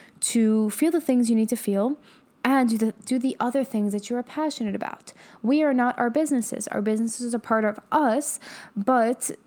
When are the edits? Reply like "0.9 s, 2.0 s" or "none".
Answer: none